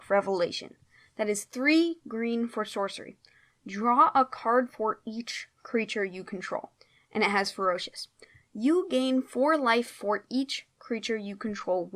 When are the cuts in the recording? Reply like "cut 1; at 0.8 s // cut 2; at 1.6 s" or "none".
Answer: cut 1; at 2.0 s